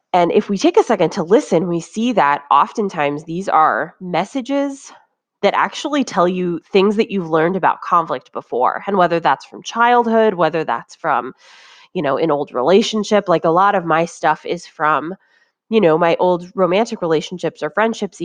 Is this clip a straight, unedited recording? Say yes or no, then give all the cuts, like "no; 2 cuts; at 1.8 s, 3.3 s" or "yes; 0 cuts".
yes; 0 cuts